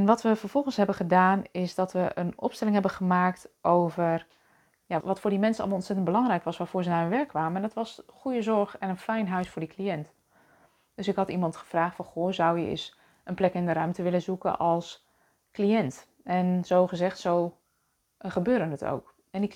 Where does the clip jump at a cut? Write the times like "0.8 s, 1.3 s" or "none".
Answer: 5.0 s